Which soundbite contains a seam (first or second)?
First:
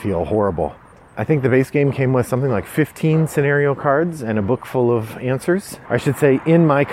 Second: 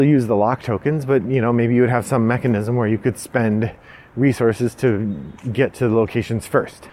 first